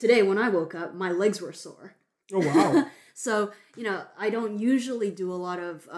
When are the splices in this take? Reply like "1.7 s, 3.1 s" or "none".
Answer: none